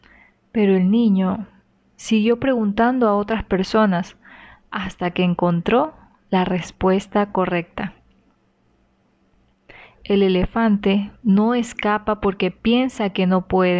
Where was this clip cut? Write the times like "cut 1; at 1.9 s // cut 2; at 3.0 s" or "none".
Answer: cut 1; at 2.0 s